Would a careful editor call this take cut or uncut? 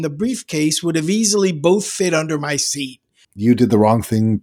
cut